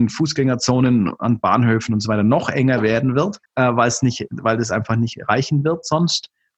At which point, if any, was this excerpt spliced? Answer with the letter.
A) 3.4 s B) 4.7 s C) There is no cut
A